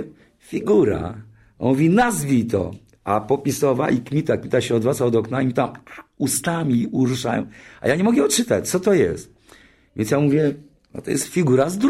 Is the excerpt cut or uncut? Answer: uncut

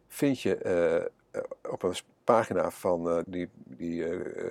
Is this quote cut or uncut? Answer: cut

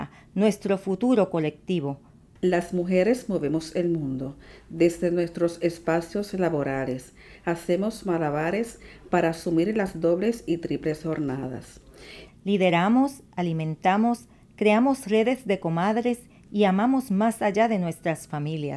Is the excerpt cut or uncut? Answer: cut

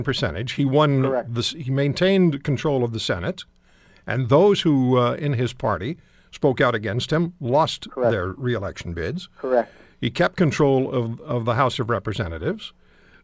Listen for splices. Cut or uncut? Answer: uncut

